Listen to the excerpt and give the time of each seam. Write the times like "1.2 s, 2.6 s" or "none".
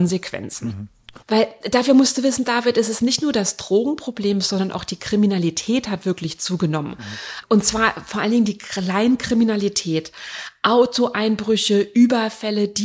1.2 s